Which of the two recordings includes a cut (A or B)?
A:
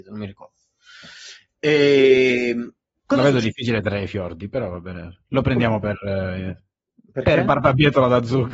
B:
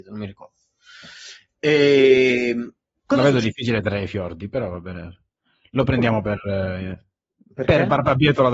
A